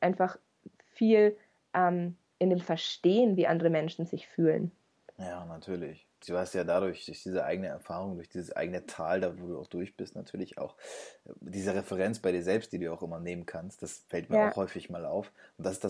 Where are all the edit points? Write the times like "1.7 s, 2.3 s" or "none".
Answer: 6.2 s